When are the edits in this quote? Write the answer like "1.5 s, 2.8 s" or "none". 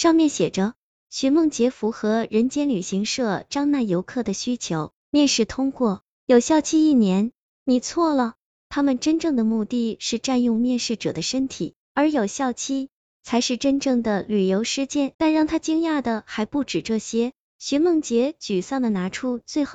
7.5 s, 15.1 s